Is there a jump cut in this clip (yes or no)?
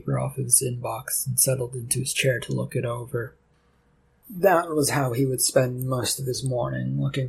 no